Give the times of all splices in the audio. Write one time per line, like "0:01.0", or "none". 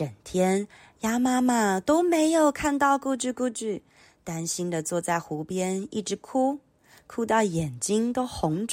none